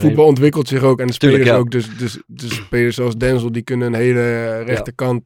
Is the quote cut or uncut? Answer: uncut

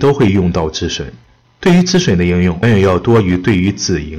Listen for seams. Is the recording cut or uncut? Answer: cut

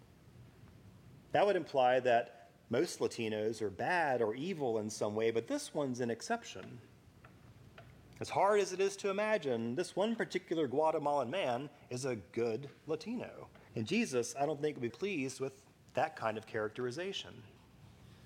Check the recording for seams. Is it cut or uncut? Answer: cut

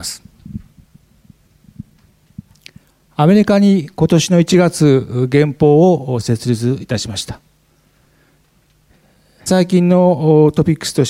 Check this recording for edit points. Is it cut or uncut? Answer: cut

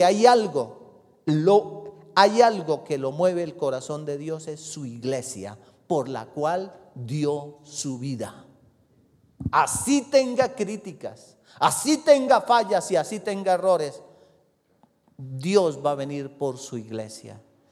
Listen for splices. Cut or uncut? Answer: uncut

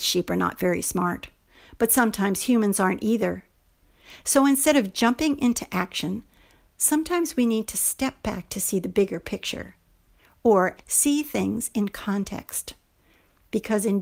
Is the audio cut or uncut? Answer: cut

